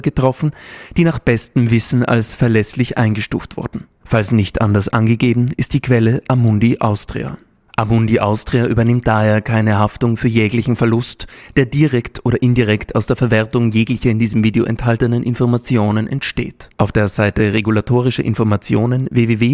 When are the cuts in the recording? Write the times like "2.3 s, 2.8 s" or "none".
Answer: 7.7 s, 16.8 s